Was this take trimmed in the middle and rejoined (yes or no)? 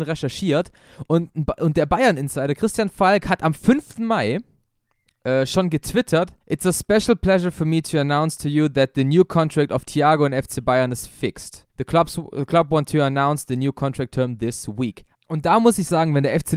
yes